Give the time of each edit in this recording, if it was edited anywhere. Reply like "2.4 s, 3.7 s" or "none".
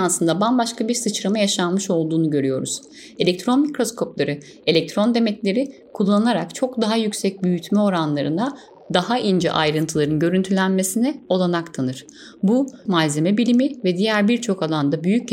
12.9 s